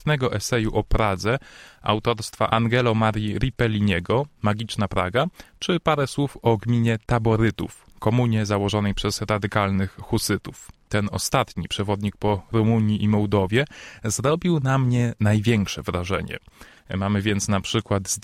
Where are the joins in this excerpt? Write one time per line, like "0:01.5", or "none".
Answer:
0:10.9
0:16.8